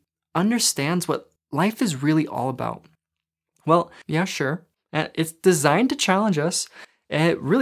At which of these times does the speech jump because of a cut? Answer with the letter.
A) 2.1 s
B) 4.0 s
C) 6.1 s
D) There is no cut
B